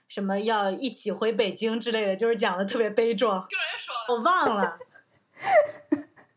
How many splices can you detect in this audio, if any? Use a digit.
1